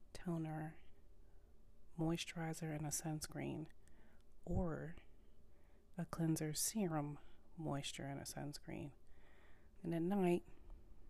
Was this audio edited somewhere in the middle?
yes; 1 cut; at 9.8 s

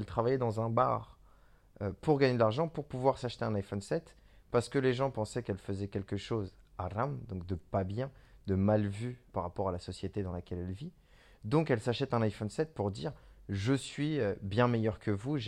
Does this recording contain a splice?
yes; 1 cut; at 9.3 s

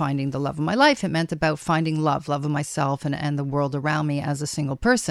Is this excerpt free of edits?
yes; 0 cuts

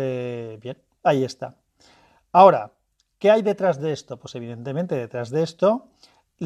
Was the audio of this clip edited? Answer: no; 0 cuts

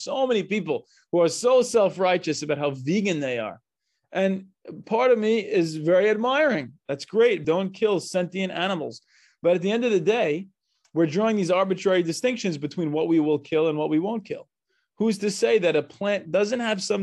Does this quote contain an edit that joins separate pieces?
yes; 1 cut; at 7.4 s

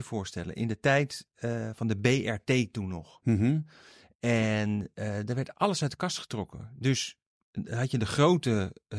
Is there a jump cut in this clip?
no; 0 cuts

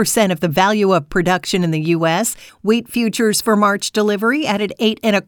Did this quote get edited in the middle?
yes; 1 cut; at 2.5 s

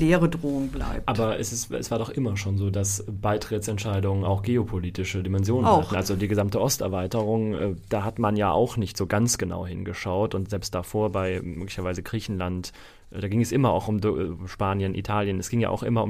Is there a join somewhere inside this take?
no; 0 cuts

